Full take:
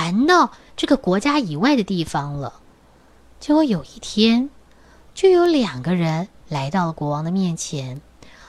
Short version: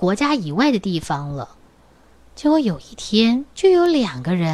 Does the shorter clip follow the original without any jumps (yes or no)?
no